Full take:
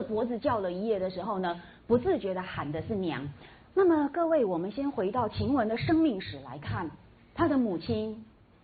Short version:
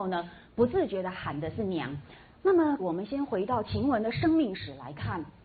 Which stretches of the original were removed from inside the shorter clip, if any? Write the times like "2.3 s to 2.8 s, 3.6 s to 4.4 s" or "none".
4.1 s to 4.4 s

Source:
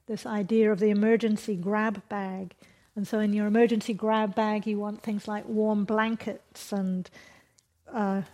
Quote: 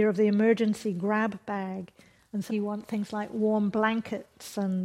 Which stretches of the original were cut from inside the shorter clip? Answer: 3.1 s to 4.6 s

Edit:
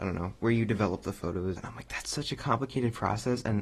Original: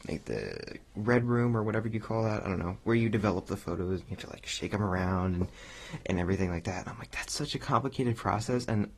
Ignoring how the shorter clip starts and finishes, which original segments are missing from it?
4.0 s to 6.8 s

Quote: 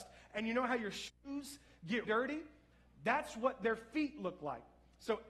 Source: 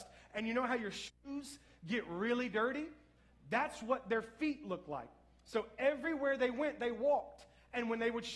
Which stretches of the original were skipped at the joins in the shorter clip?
2.0 s to 2.5 s

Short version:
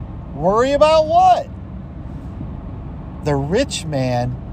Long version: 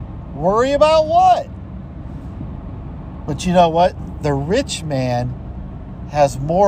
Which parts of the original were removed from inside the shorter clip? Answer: 3.2 s to 4.2 s

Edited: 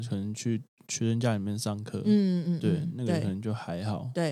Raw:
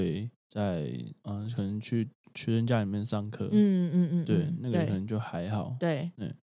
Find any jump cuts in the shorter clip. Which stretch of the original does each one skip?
3.9 s to 4.1 s

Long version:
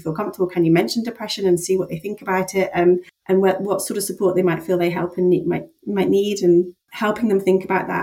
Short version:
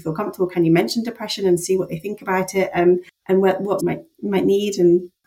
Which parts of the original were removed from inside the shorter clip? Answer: 3.8 s to 5.4 s

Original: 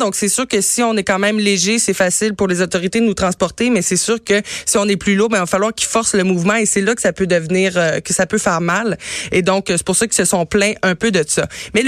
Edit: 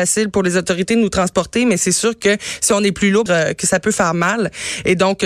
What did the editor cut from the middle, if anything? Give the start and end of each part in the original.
5.3 s to 7.7 s

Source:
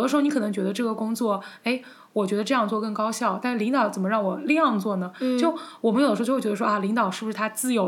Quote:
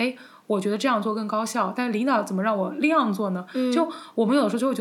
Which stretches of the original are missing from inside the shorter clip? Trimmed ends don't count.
none

